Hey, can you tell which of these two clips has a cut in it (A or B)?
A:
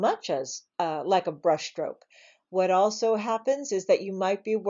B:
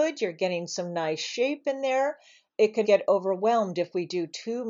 B